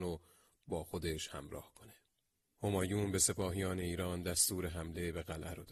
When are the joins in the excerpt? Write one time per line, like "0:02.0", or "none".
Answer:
0:02.5